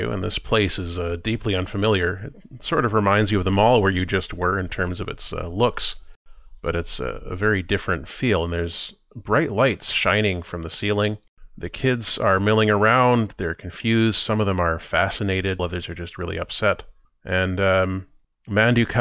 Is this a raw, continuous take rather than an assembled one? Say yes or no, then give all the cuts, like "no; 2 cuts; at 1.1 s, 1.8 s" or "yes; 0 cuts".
no; 1 cut; at 15.6 s